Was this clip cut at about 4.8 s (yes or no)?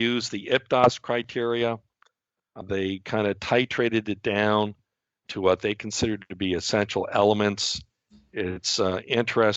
no